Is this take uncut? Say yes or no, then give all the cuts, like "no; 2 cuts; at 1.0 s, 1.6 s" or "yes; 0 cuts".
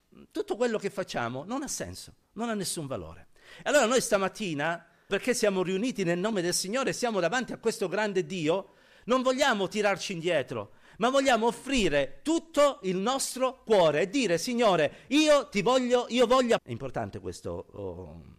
no; 2 cuts; at 5.1 s, 16.6 s